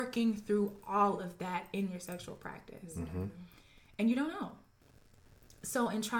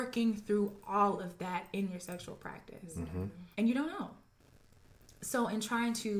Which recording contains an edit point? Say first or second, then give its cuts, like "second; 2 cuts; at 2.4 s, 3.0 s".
second; 1 cut; at 3.5 s